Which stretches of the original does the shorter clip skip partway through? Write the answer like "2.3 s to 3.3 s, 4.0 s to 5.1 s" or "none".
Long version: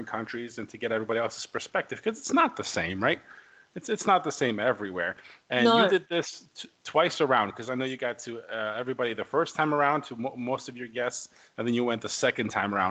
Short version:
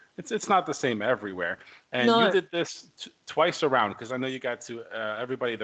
none

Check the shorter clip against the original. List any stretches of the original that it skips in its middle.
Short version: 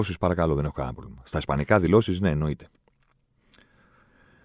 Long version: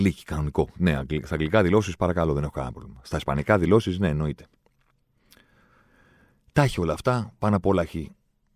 none

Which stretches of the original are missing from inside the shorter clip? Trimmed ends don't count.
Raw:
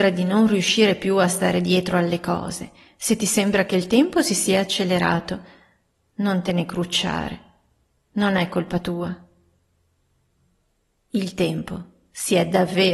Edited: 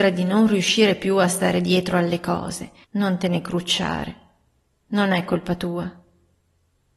2.8 s to 6.1 s

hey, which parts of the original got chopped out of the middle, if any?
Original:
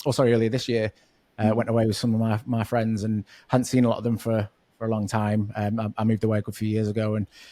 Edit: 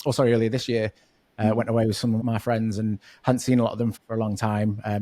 2.2 s to 2.4 s, 4.2 s to 4.6 s

